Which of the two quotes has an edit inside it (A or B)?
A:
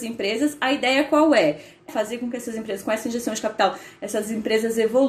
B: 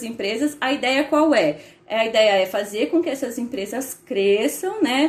A